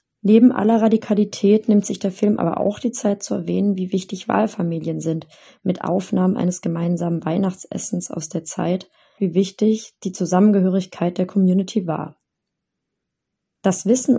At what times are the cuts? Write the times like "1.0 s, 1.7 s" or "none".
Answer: 9.2 s